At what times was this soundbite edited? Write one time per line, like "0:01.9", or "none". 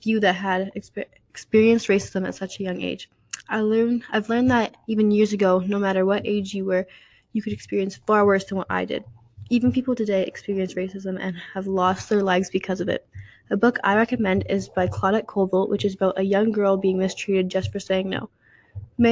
none